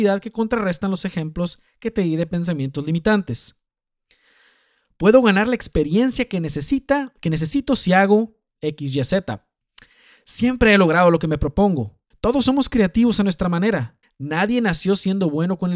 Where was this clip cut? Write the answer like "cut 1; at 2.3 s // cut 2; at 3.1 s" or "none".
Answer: cut 1; at 12.1 s // cut 2; at 14.0 s